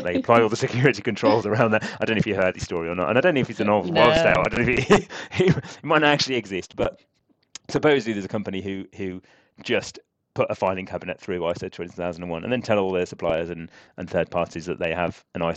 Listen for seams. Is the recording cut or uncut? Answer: uncut